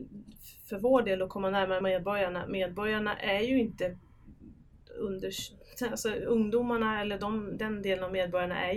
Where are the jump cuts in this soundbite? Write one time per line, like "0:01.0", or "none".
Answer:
none